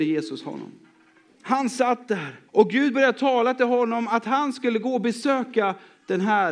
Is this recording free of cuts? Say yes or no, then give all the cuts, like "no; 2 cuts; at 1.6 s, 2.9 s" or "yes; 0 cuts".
no; 2 cuts; at 1.3 s, 2.5 s